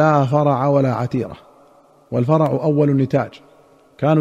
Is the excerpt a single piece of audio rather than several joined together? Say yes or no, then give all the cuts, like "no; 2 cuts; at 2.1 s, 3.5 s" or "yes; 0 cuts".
yes; 0 cuts